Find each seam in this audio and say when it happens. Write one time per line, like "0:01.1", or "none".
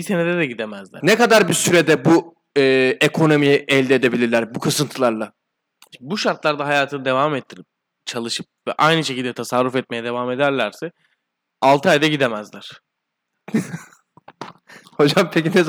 0:01.0